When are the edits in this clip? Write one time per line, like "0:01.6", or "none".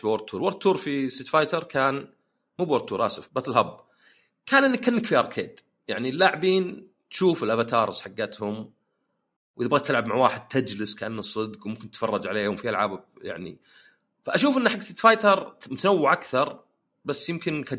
0:03.3